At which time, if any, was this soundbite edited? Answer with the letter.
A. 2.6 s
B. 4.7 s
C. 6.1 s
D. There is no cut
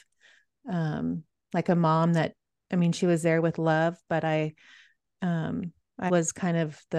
C